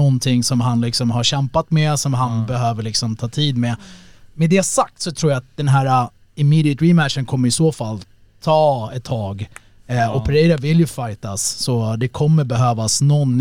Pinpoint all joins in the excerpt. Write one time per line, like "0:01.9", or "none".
none